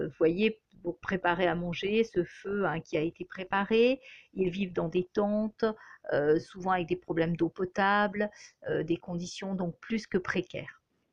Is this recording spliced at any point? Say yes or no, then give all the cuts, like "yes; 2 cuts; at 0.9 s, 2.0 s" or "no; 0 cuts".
no; 0 cuts